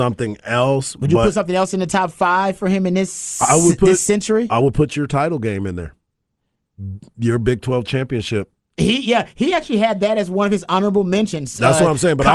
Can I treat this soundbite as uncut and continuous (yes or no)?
yes